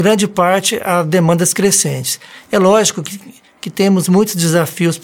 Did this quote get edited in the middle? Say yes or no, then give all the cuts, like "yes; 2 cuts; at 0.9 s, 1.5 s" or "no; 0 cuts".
no; 0 cuts